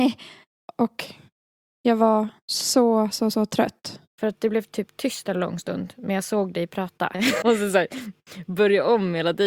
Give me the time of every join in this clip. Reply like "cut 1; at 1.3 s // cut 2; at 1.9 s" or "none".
cut 1; at 4.1 s // cut 2; at 7.4 s

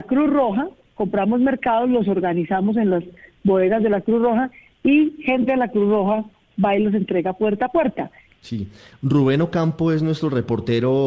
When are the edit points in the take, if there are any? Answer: cut 1; at 8.3 s

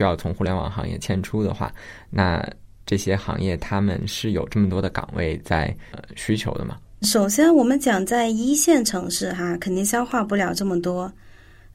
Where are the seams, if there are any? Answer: none

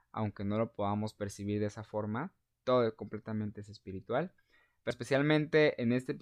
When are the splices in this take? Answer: cut 1; at 4.9 s

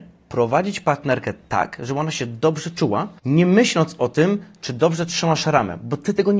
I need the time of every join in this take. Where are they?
cut 1; at 3.2 s

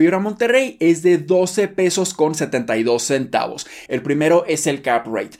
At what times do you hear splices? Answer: cut 1; at 3.9 s

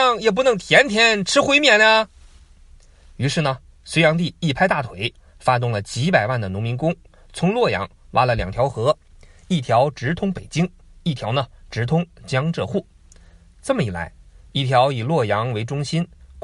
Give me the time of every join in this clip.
none

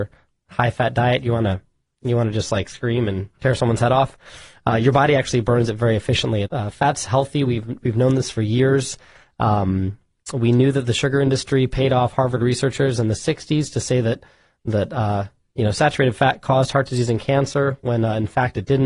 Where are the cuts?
cut 1; at 6.4 s

